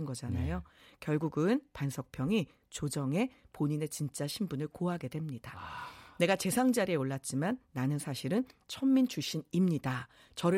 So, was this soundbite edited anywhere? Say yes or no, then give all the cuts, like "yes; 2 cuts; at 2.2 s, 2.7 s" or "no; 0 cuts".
no; 0 cuts